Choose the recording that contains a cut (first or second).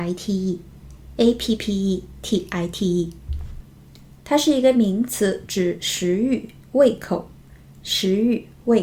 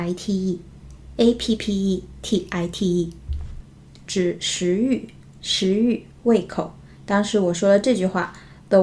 second